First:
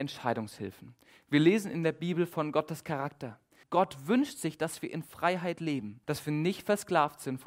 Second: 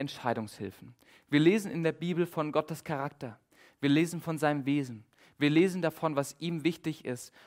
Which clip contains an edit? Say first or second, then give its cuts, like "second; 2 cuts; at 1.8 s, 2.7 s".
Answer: first; 2 cuts; at 3.6 s, 6.0 s